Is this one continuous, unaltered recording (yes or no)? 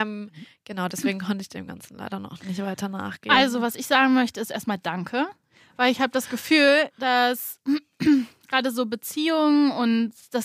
yes